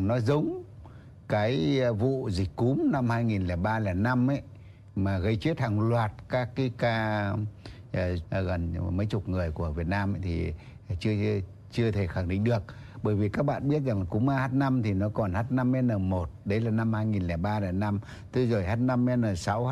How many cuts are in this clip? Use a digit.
2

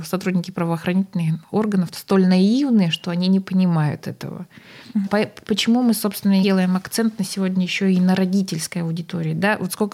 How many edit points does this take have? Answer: 2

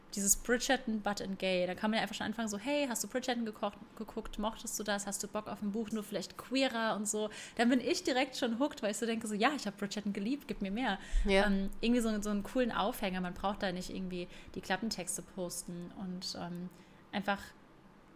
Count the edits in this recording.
1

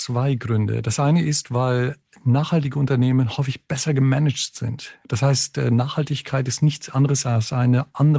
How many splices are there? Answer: 0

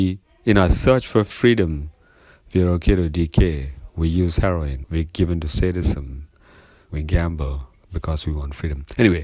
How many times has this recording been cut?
2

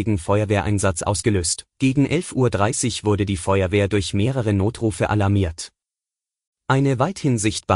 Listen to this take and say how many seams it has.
1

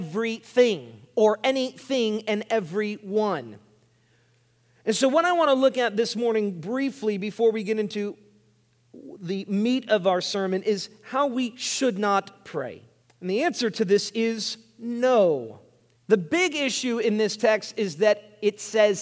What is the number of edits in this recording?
2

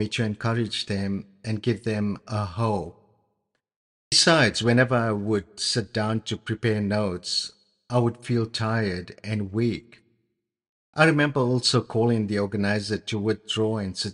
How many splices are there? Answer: 1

